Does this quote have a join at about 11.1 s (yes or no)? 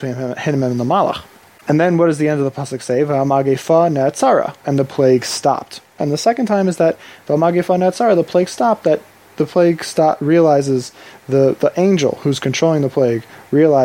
no